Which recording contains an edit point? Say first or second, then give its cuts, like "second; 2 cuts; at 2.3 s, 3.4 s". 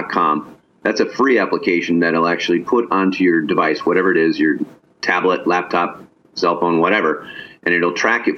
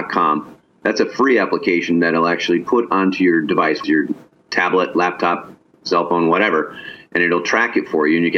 second; 1 cut; at 3.8 s